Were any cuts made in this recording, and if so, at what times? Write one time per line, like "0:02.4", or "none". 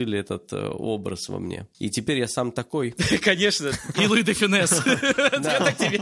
0:01.7
0:03.9